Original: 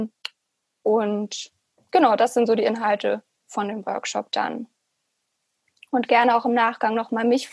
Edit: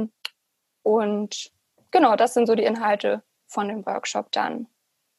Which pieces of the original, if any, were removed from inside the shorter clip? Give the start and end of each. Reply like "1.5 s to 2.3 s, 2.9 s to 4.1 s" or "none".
none